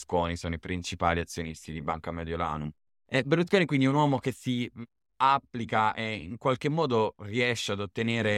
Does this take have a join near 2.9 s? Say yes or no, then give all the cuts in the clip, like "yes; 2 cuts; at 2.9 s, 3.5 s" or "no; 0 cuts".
no; 0 cuts